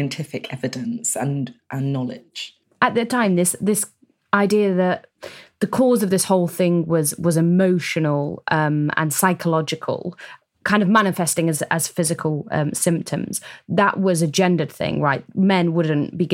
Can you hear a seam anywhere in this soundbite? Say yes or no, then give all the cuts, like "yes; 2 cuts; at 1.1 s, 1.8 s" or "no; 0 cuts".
no; 0 cuts